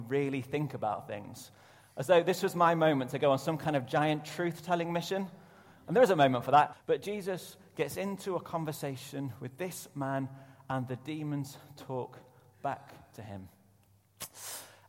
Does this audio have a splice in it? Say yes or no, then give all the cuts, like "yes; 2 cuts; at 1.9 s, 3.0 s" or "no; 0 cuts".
yes; 1 cut; at 6.7 s